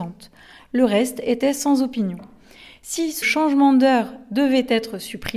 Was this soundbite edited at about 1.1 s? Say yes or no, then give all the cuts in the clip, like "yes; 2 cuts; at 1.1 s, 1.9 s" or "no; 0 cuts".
no; 1 cut; at 3.2 s